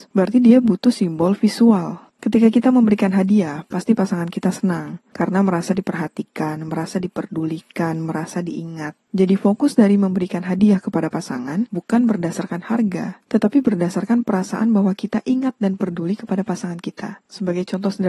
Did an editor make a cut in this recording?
no; 0 cuts

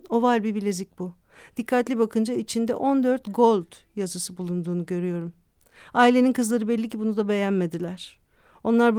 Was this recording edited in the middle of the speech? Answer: no; 0 cuts

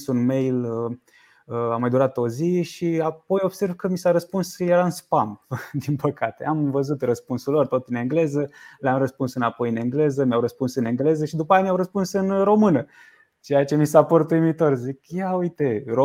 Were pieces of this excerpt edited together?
no; 0 cuts

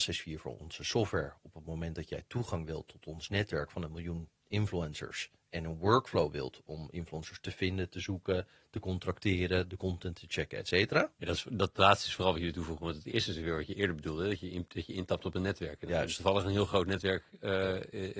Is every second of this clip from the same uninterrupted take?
yes; 0 cuts

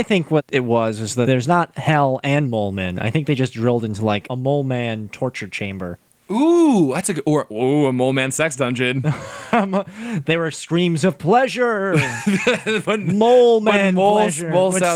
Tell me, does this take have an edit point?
no; 0 cuts

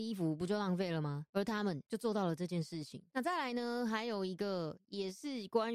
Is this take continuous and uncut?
no; 1 cut; at 3.1 s

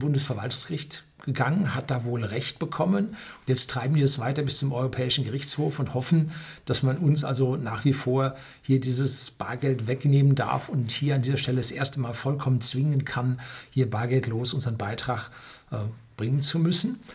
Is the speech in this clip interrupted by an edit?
no; 0 cuts

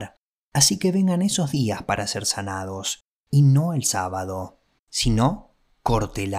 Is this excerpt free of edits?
no; 1 cut; at 4.8 s

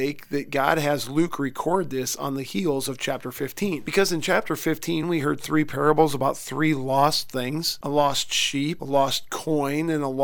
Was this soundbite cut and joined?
no; 0 cuts

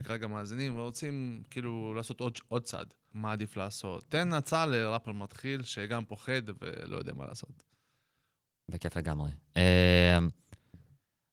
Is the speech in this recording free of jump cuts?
no; 1 cut; at 3.1 s

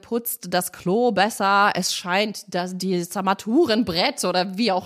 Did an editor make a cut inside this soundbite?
no; 0 cuts

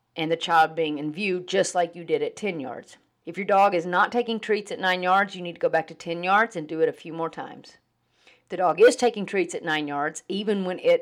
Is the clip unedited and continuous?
no; 1 cut; at 3.2 s

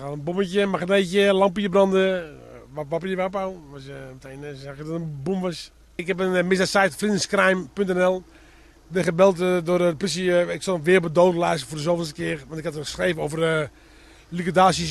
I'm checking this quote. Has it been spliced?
no; 0 cuts

